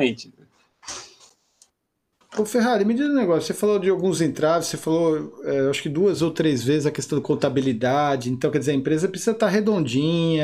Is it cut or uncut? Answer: uncut